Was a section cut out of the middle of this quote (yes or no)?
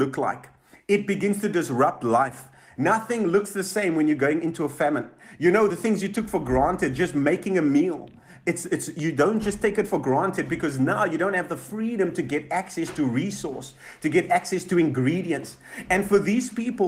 no